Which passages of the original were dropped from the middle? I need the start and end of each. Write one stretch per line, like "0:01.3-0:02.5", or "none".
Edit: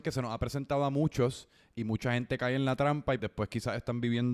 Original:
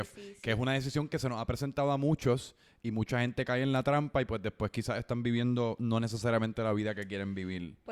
0:04.3-0:04.4